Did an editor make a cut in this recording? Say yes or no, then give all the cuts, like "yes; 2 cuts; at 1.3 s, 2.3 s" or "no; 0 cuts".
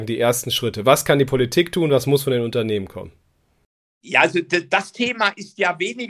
no; 0 cuts